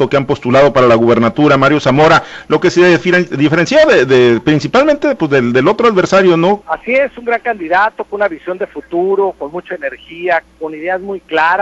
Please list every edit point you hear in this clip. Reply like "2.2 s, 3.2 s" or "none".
6.6 s, 10.4 s